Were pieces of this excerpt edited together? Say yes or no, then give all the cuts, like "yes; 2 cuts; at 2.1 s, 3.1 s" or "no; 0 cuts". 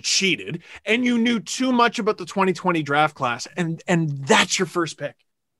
no; 0 cuts